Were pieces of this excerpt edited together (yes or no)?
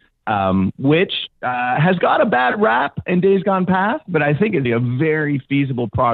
yes